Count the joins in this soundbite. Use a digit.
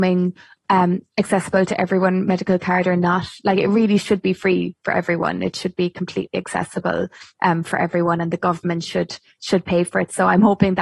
0